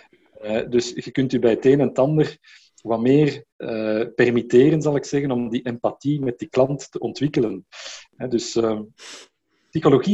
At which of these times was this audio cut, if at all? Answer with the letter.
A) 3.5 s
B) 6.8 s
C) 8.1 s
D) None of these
A